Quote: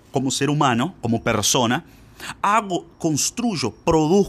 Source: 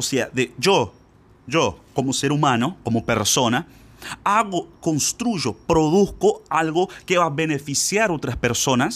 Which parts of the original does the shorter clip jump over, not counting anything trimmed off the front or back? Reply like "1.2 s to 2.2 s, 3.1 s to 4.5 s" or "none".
none